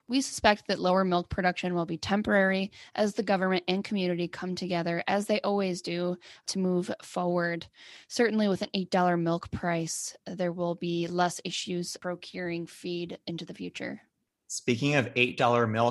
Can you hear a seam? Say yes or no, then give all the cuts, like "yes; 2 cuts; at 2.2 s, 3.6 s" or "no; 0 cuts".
no; 0 cuts